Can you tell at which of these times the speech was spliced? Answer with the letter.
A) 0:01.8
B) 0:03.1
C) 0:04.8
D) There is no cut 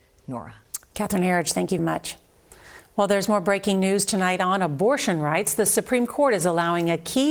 A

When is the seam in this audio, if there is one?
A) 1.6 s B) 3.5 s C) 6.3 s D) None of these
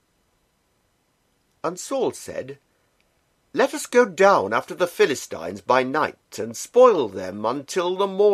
D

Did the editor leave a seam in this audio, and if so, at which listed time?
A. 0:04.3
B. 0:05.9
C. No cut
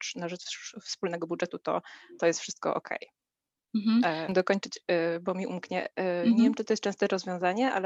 A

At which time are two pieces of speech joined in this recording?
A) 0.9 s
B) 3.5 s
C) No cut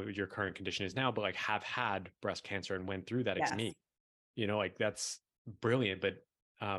B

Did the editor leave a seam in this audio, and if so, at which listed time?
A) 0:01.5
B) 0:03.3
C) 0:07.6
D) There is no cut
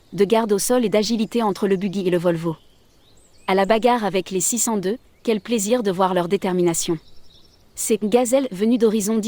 C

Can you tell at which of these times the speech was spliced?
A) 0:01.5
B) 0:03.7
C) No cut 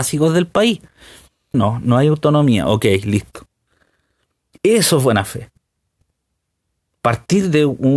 A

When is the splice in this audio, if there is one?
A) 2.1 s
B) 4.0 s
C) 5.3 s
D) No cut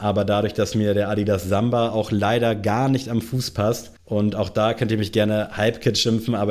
B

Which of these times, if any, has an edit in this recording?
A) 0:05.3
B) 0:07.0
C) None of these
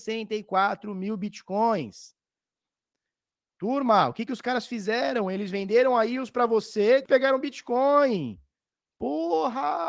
B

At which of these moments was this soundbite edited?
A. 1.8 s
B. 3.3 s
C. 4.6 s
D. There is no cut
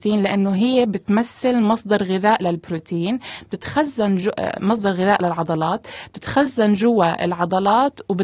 D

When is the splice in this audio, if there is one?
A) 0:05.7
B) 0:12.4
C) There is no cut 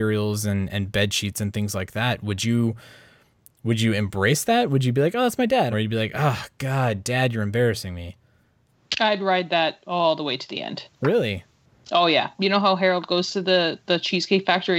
A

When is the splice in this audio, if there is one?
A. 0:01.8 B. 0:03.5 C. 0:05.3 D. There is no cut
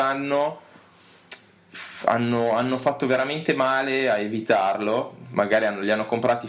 D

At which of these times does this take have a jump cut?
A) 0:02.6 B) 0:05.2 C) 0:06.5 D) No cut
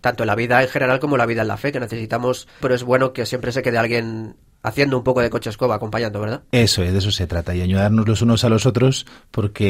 A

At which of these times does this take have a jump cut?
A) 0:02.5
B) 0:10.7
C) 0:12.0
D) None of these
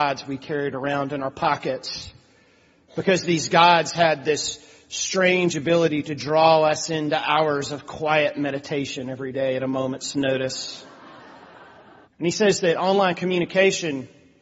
C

